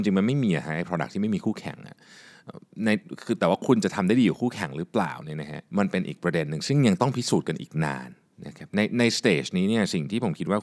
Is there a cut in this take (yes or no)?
yes